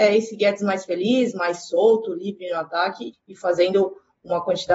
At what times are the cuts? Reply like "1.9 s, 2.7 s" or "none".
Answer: 3.1 s